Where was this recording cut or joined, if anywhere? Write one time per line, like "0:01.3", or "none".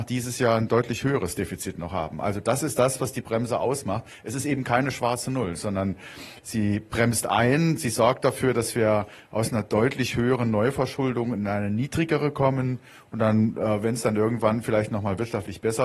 none